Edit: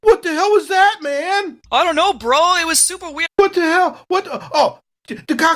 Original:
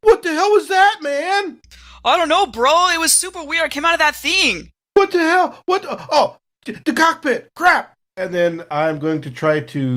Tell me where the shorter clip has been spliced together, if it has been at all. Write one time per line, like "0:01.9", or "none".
0:01.7
0:03.3